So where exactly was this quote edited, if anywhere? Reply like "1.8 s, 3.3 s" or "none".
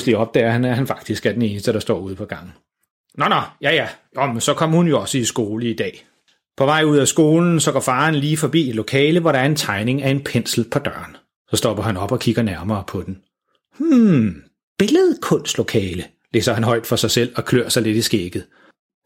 none